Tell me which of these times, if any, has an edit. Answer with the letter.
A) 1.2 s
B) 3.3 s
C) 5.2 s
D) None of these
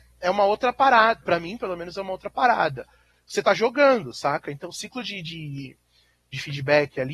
D